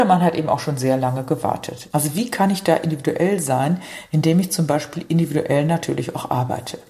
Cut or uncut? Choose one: cut